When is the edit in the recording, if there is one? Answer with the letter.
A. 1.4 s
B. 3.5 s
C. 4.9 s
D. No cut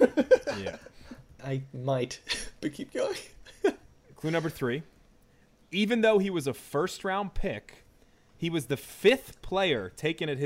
A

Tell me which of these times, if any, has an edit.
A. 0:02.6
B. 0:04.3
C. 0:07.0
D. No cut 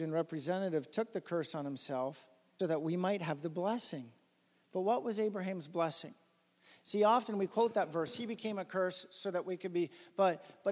A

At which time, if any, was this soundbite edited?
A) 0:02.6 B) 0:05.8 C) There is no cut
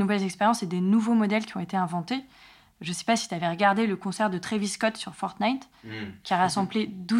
C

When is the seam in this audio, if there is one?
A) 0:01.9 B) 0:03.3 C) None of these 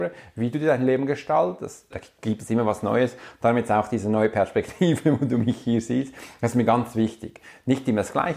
A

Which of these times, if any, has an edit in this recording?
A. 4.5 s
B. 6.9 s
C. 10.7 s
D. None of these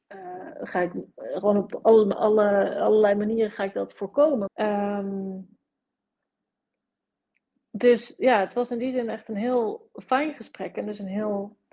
A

